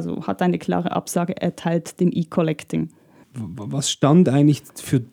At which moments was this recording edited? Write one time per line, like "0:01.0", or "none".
0:03.2